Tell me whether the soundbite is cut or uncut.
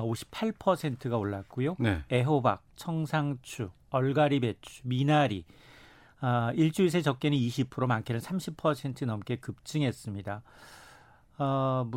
uncut